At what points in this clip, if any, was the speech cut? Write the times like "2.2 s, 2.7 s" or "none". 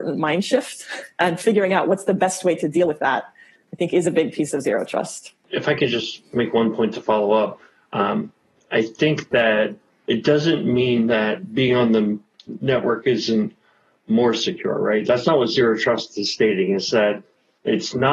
none